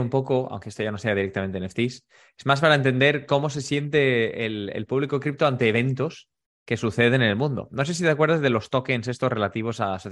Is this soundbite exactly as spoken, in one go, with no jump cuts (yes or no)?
yes